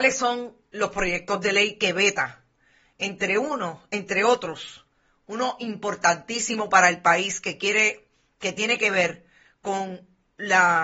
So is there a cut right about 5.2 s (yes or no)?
no